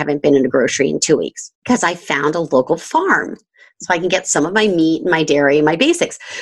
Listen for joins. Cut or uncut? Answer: cut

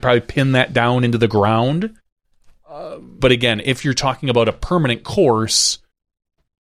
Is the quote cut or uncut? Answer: cut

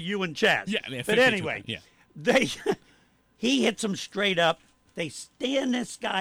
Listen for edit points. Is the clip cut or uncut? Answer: uncut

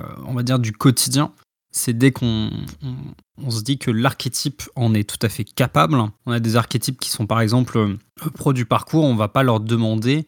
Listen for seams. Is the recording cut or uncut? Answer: uncut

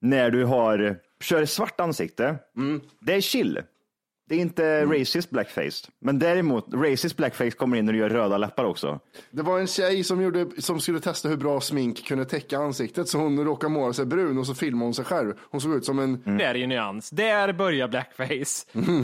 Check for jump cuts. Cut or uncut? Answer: cut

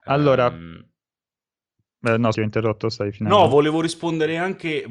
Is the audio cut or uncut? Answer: cut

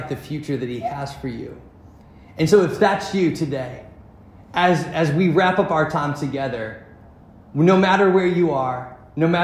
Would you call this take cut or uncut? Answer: uncut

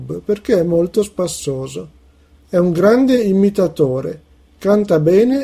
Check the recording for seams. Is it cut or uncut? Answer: cut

